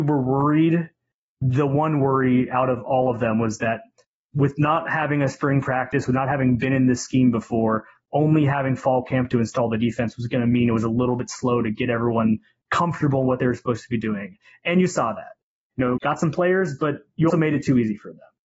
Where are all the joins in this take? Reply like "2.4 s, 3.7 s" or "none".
16.0 s, 17.3 s